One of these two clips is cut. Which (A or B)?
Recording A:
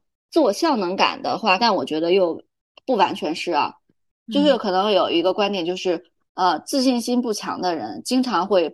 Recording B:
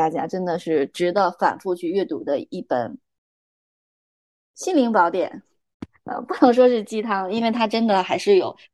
A